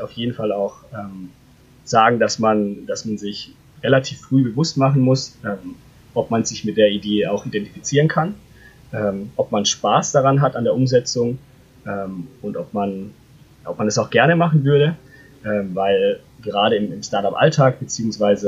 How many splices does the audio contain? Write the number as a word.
zero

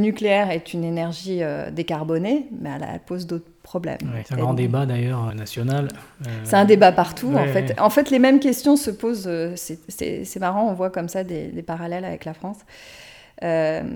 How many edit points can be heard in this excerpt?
two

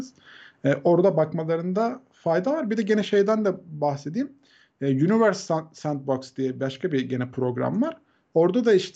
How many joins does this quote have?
zero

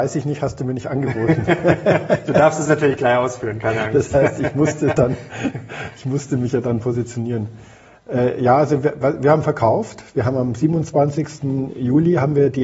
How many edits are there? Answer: zero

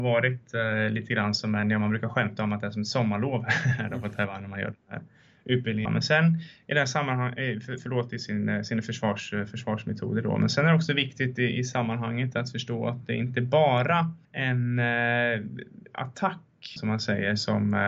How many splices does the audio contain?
three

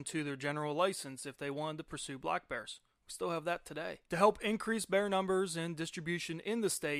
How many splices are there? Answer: one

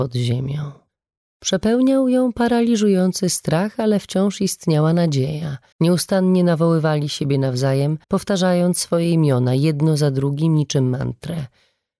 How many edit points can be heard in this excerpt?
two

